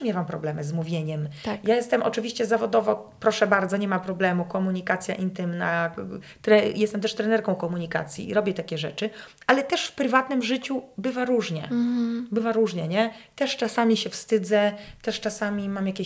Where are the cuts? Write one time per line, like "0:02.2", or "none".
none